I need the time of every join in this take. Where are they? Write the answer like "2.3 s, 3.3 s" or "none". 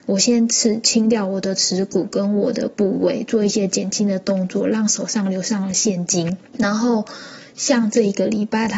6.5 s